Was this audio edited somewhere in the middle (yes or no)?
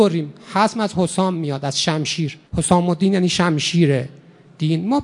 yes